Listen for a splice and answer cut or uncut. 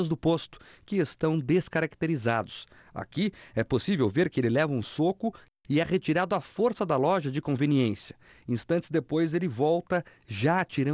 uncut